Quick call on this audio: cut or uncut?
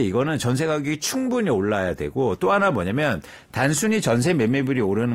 uncut